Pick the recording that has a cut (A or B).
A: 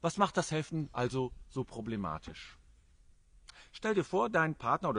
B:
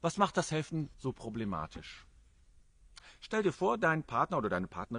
B